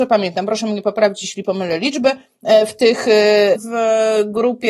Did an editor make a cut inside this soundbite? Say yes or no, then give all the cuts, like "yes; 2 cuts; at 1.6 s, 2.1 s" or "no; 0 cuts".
yes; 1 cut; at 3.6 s